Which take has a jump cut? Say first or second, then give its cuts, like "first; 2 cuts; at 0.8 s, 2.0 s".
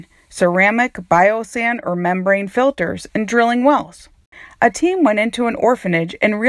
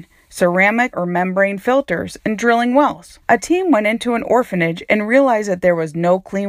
second; 2 cuts; at 0.9 s, 3.2 s